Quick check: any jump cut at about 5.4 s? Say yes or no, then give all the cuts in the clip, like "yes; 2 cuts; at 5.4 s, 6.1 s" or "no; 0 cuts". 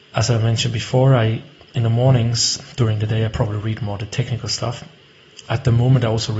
no; 0 cuts